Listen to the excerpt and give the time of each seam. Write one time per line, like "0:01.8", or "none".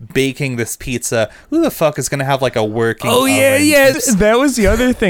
0:03.9